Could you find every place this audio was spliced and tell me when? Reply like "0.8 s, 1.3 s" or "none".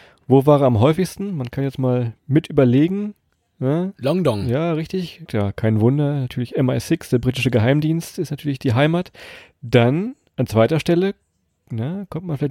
5.3 s